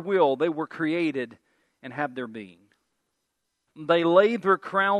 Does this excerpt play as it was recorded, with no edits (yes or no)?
no